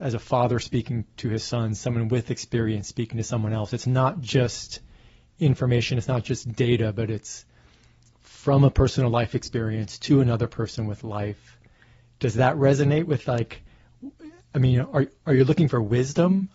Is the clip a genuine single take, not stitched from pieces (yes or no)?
yes